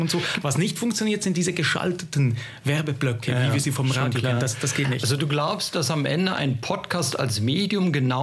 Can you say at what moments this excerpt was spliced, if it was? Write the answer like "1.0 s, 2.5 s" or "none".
none